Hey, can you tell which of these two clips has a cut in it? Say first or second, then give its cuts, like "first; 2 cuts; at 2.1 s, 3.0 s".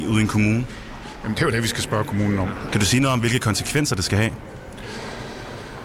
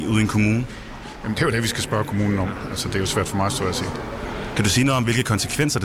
first; 1 cut; at 2.7 s